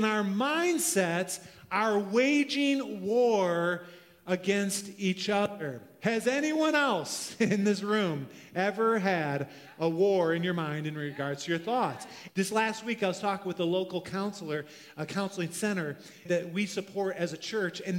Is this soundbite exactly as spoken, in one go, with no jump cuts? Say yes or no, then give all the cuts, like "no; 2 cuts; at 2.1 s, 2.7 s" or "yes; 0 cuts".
no; 2 cuts; at 12.3 s, 16.2 s